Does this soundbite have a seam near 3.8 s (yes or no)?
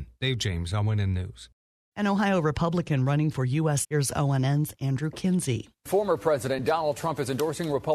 yes